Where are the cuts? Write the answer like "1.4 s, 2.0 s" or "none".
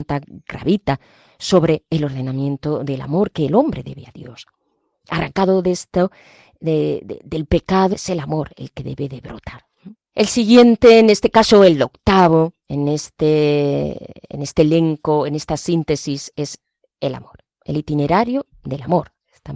7.9 s, 10.0 s

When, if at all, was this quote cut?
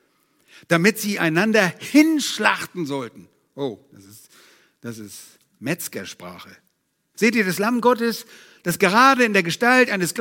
7.1 s

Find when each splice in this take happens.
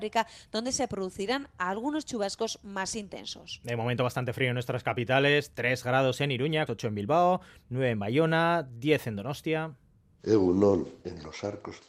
6.7 s

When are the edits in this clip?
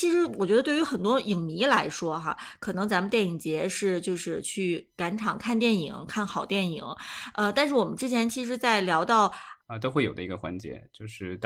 9.6 s

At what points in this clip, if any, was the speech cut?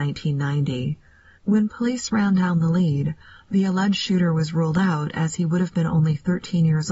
1.4 s

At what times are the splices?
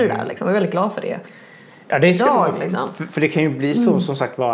none

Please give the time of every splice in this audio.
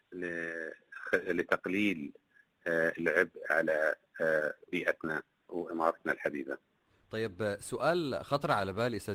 none

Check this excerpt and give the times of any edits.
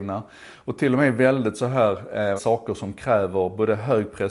2.4 s

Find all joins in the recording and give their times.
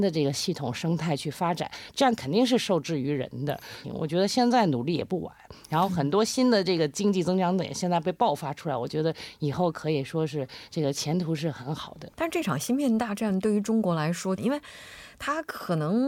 3.8 s, 12.1 s, 14.4 s

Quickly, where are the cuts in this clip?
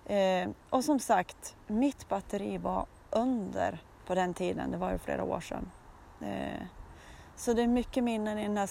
4.0 s

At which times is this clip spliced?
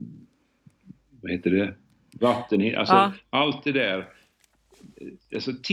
2.2 s

